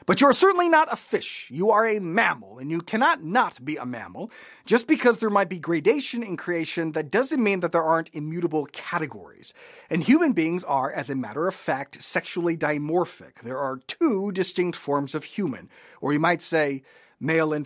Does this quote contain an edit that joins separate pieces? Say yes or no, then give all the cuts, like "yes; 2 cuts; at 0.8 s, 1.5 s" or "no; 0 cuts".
no; 0 cuts